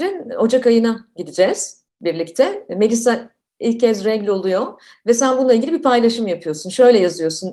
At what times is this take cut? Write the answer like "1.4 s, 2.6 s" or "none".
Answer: none